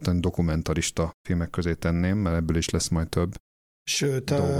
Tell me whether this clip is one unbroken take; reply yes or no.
no